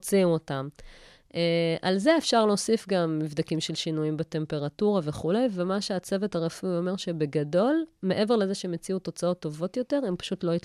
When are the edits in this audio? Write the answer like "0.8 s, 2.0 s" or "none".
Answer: none